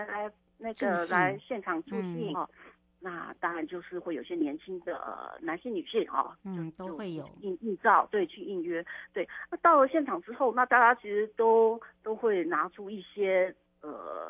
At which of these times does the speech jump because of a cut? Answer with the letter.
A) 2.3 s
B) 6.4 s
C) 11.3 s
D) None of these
A